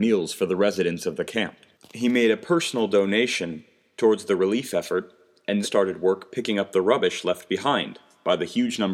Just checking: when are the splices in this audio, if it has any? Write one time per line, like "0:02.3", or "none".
0:01.7
0:05.6